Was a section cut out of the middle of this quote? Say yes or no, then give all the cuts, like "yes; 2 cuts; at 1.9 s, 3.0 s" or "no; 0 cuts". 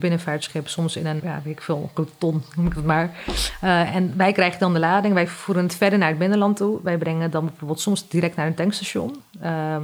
yes; 1 cut; at 1.2 s